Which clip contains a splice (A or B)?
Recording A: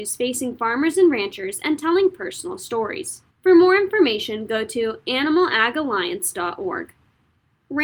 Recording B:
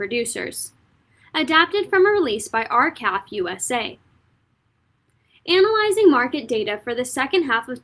A